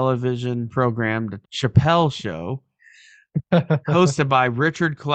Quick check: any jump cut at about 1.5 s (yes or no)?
yes